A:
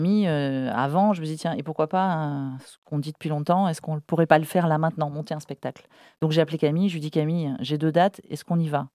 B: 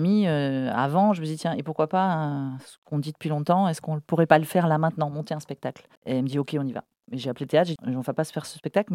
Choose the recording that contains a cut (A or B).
B